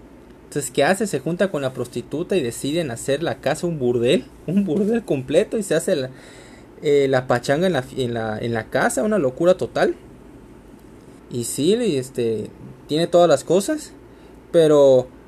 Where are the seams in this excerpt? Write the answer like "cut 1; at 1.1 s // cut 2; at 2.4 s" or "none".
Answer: cut 1; at 11.2 s